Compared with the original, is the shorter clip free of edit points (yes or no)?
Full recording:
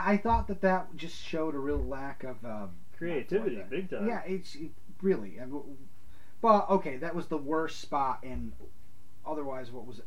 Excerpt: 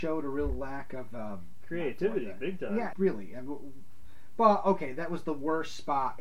no